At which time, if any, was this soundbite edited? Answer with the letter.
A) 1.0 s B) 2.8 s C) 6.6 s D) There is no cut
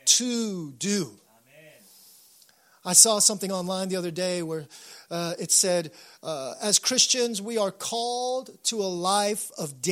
D